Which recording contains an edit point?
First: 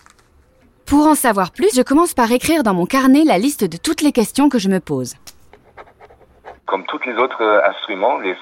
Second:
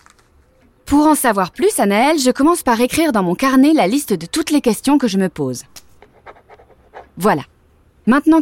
first; 2 cuts; at 1.7 s, 6.6 s

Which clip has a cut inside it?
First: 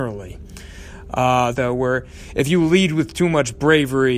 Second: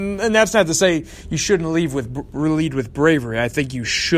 first; 1 cut; at 1.5 s

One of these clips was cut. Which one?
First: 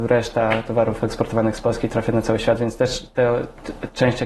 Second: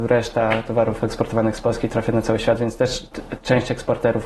second; 1 cut; at 3.1 s

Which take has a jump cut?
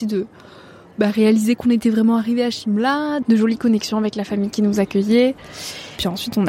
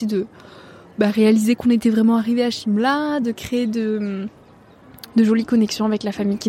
first; 1 cut; at 3.2 s

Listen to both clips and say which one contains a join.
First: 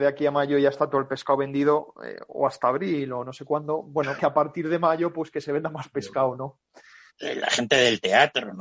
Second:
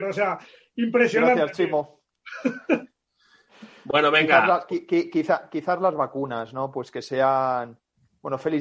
first; 2 cuts; at 4.2 s, 7.1 s

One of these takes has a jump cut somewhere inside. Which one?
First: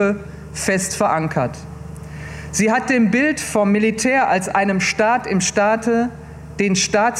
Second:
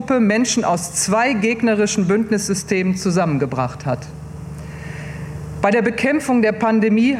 second; 1 cut; at 5.6 s

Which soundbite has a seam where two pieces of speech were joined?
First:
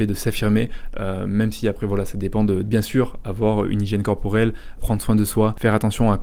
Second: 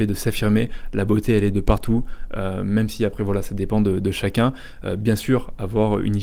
first; 3 cuts; at 0.9 s, 2.6 s, 4.8 s

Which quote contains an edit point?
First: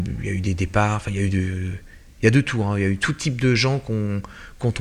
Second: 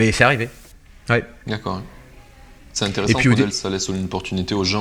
second; 1 cut; at 3.5 s

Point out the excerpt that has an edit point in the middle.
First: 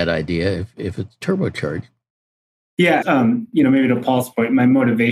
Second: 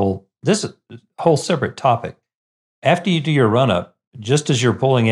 first; 1 cut; at 3.0 s

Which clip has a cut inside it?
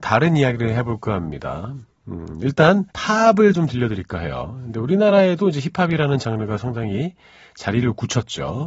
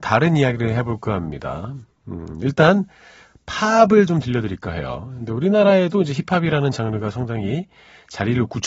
first; 1 cut; at 2.9 s

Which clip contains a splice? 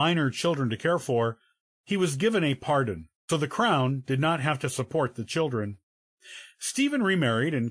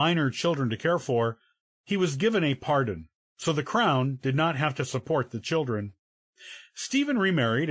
first; 1 cut; at 3.3 s

